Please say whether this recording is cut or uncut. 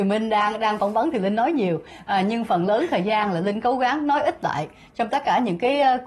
uncut